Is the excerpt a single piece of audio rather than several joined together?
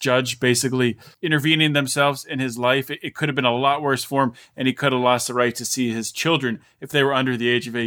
yes; 0 cuts

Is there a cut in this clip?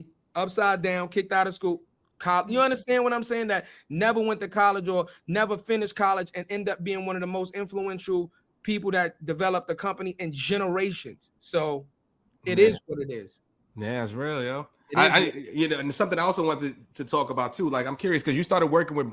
no; 0 cuts

